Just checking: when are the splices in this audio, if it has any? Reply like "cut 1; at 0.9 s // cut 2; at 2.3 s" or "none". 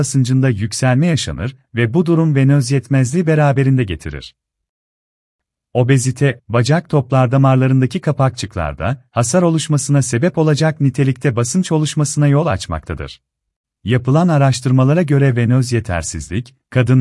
cut 1; at 6.4 s // cut 2; at 13.6 s